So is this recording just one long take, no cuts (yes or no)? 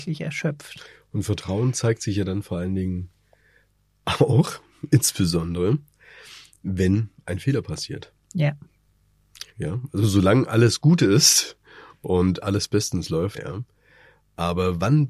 no